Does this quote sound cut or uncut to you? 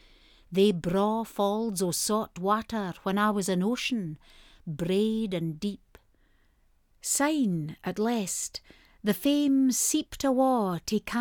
uncut